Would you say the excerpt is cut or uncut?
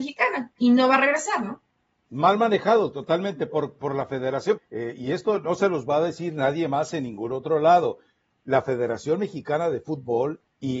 cut